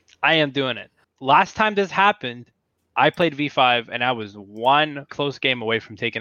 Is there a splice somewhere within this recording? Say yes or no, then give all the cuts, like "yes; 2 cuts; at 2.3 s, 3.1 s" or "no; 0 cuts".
yes; 2 cuts; at 1.0 s, 5.1 s